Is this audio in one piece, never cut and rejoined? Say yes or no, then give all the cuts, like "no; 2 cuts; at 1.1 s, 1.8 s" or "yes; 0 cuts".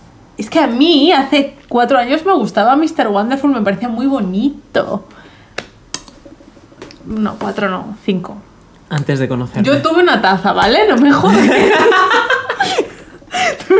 yes; 0 cuts